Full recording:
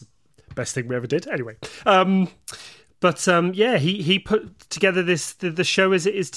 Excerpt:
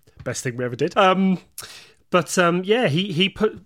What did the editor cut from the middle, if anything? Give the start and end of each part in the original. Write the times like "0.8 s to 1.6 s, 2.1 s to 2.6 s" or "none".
1.2 s to 1.8 s